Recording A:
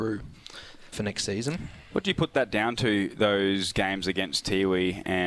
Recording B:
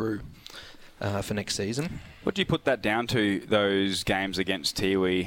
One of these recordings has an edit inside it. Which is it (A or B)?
A